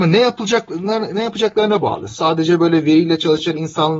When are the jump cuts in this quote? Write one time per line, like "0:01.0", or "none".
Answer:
none